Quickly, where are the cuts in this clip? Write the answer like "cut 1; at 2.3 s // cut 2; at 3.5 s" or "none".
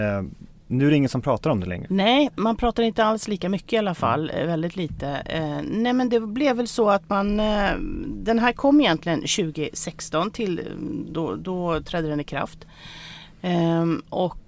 cut 1; at 1.8 s